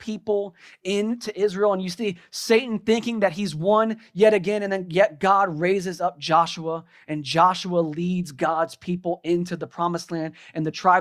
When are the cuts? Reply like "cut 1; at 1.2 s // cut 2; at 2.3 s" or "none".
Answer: none